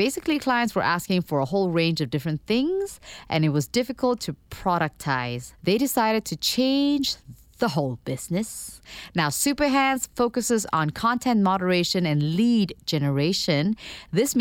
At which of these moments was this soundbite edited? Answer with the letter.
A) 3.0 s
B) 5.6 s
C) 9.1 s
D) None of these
B